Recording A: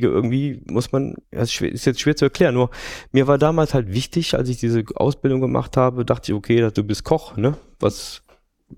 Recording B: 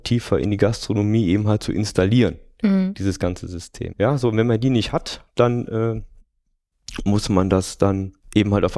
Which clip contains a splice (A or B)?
B